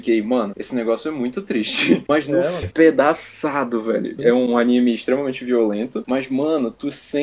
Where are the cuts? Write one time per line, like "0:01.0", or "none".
0:02.6
0:04.2